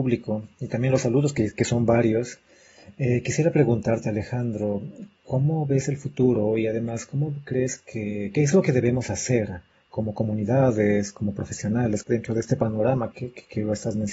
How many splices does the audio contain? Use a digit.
2